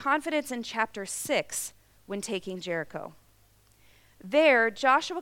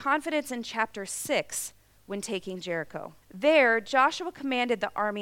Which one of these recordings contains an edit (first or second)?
second